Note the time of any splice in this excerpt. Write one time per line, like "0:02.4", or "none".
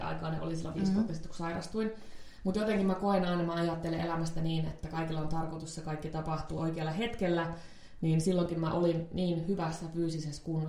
0:06.6